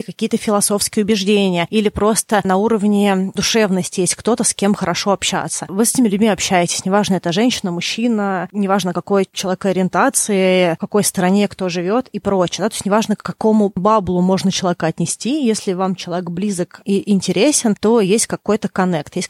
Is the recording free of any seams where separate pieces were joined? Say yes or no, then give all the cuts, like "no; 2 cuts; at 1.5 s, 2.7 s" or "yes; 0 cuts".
yes; 0 cuts